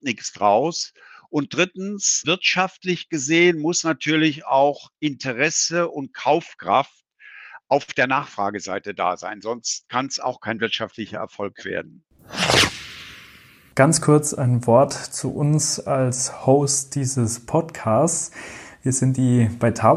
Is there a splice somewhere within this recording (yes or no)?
yes